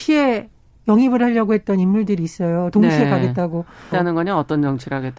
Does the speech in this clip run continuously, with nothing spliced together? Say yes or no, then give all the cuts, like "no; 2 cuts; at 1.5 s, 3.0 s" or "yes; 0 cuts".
no; 1 cut; at 3.9 s